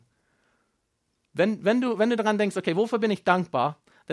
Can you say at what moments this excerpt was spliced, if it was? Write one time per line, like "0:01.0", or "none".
none